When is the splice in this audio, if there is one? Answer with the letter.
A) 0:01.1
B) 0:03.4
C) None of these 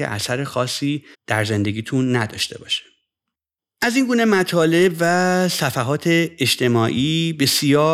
A